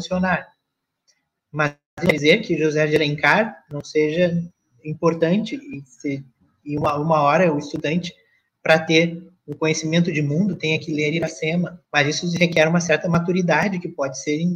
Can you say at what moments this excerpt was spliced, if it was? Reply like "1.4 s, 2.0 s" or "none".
11.9 s

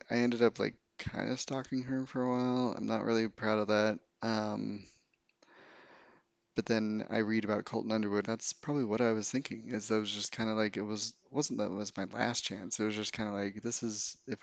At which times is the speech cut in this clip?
8.2 s

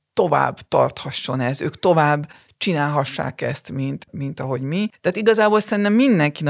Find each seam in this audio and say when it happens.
4.9 s

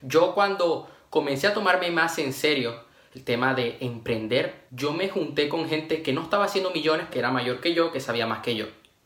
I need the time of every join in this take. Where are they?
7.1 s

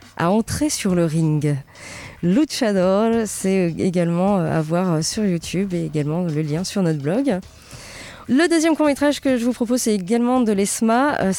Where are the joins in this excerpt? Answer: 8.3 s

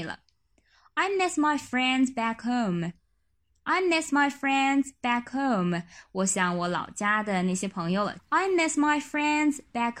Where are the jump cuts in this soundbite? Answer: none

